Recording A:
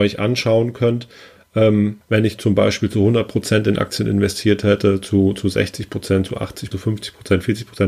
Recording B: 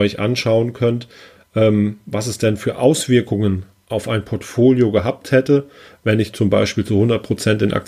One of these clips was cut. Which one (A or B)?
A